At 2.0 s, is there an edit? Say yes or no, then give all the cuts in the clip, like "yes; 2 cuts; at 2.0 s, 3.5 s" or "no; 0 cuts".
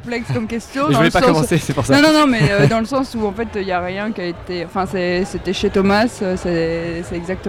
no; 0 cuts